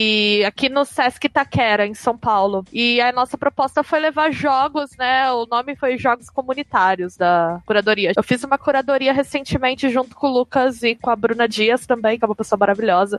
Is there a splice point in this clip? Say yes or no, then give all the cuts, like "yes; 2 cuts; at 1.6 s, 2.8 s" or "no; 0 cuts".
yes; 2 cuts; at 8.1 s, 12.2 s